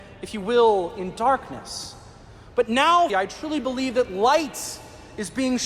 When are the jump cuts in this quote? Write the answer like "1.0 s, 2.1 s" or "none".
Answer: 3.1 s